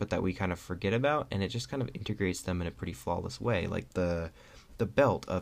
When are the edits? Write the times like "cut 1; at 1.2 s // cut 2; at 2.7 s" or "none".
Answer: cut 1; at 3.9 s